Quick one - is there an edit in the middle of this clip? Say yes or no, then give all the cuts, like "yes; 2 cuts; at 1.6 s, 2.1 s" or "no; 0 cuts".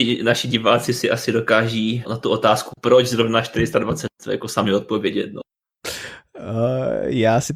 yes; 1 cut; at 2.0 s